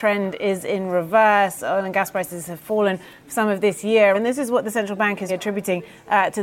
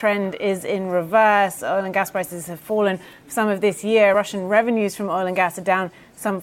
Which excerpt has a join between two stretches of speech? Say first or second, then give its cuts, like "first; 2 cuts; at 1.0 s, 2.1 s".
first; 2 cuts; at 4.1 s, 5.3 s